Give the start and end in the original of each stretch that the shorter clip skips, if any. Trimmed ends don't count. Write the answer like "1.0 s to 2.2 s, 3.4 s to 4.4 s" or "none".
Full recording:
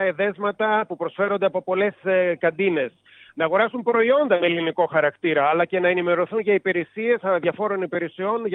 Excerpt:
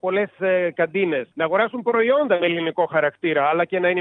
3.0 s to 3.3 s

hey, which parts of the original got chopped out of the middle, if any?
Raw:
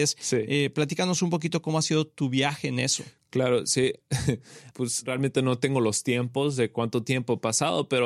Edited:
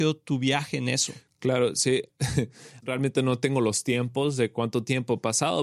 4.7 s to 5.0 s

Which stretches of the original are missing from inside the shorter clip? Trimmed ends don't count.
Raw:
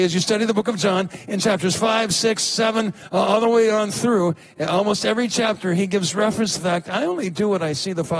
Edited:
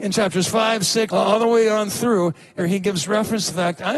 2.4 s to 3.1 s, 4.6 s to 5.7 s

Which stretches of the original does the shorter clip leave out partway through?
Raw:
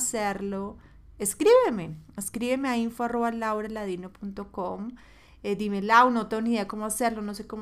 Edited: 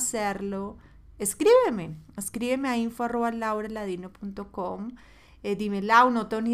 none

